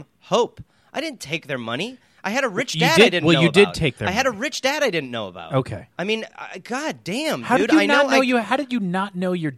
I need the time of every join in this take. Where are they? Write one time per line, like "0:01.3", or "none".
0:05.9